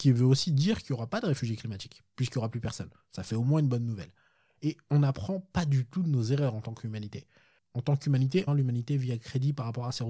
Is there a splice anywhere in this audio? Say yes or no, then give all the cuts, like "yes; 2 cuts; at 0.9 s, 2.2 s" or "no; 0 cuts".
yes; 1 cut; at 8.5 s